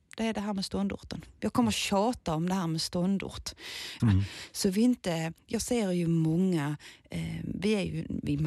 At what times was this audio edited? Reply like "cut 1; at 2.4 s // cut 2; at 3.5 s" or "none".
cut 1; at 4.0 s